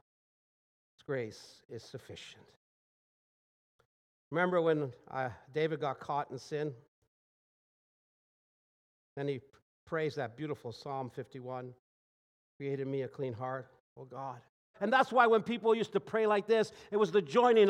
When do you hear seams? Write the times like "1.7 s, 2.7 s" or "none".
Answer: 14.7 s